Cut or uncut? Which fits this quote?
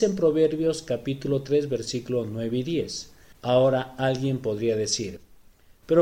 cut